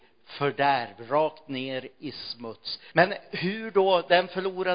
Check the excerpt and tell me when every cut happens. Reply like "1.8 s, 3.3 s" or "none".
2.9 s